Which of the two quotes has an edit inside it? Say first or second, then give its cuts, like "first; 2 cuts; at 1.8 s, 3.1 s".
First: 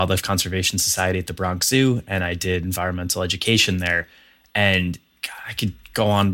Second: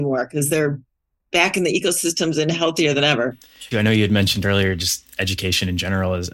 second; 1 cut; at 3.7 s